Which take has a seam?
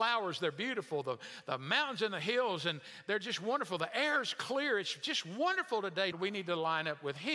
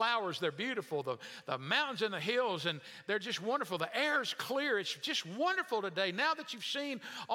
first; 1 cut; at 6.1 s

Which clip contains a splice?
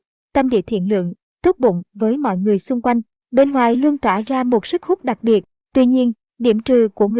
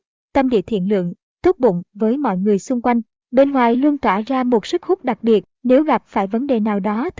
second; 1 cut; at 5.5 s

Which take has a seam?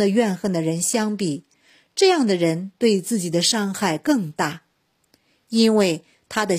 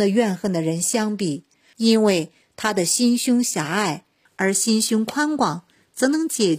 second; 2 cuts; at 1.7 s, 4.3 s

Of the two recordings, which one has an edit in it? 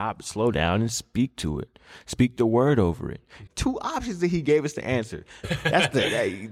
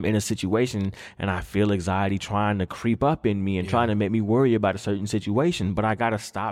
first; 2 cuts; at 3.5 s, 5.4 s

